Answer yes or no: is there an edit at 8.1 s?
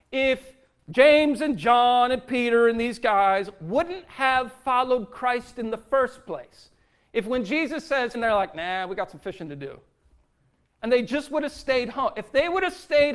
yes